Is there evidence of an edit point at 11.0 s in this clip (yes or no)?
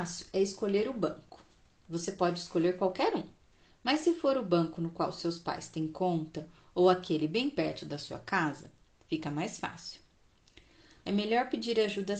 yes